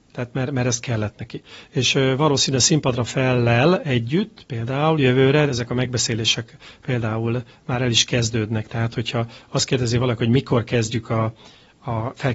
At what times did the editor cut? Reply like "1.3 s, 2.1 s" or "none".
5.5 s